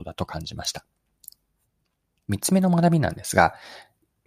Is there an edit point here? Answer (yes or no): no